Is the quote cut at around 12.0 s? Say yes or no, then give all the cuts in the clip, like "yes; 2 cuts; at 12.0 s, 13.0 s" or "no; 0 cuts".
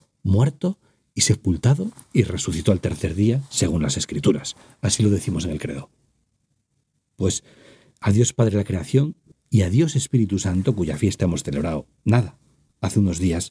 no; 1 cut; at 9.3 s